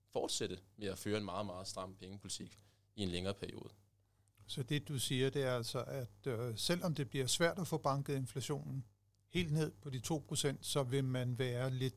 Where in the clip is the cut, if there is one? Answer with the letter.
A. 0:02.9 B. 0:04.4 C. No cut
C